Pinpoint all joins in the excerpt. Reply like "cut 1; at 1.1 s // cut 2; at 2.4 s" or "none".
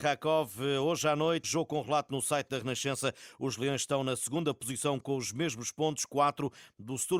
cut 1; at 1.4 s